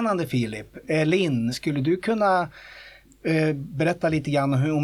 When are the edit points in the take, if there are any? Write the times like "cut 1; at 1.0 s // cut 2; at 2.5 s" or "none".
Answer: cut 1; at 1.5 s